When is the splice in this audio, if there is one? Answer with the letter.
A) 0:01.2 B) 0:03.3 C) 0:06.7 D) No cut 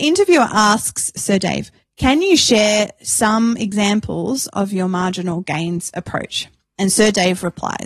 D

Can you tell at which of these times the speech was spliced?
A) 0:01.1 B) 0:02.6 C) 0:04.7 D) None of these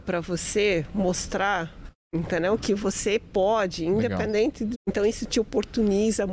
C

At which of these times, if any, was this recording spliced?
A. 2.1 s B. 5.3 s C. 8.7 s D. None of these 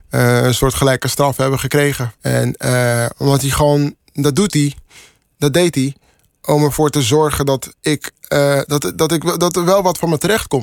A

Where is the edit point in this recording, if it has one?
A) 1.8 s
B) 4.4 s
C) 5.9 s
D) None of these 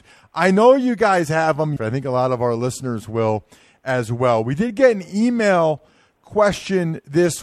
A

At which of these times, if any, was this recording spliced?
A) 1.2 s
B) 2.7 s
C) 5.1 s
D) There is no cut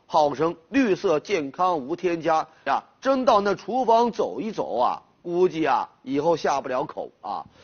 B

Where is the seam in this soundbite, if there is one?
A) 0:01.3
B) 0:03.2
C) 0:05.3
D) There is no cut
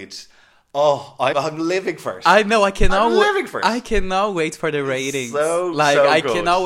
A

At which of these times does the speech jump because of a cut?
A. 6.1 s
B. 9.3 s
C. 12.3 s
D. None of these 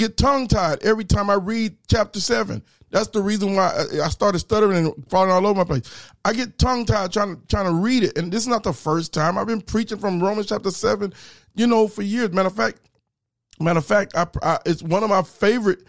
D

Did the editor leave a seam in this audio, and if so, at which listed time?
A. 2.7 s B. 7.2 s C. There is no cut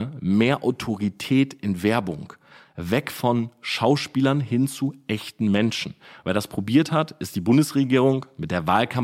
C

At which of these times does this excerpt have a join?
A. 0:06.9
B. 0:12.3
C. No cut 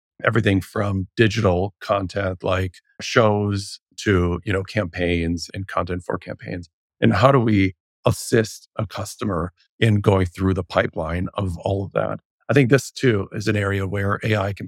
C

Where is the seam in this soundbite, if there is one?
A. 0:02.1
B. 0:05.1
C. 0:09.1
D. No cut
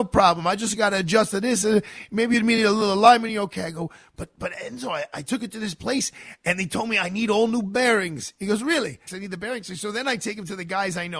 C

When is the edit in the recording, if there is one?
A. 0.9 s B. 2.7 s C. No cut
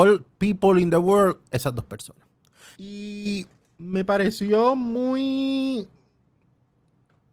B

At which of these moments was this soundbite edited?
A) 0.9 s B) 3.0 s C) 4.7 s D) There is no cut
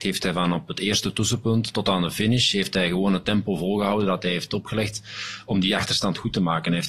D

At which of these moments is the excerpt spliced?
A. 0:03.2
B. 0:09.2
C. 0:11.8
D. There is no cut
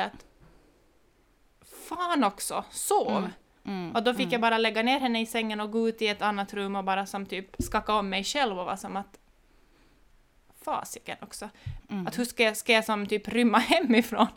C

